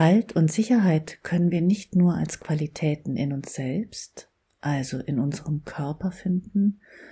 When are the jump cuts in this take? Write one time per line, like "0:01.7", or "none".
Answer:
none